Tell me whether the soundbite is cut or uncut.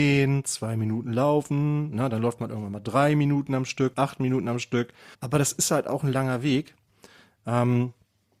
cut